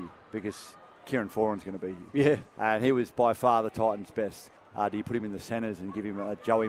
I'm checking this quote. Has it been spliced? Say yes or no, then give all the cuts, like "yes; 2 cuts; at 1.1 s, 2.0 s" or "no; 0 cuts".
yes; 1 cut; at 4.6 s